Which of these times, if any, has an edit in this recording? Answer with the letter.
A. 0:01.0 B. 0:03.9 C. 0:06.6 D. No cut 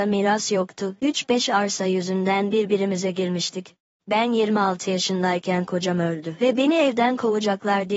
B